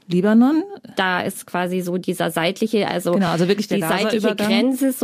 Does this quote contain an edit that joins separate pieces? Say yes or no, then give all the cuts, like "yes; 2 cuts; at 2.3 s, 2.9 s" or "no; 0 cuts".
no; 0 cuts